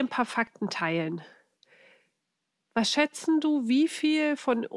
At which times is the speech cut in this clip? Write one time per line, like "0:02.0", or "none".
none